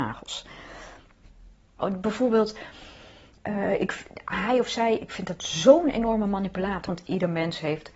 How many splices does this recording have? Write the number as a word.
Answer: two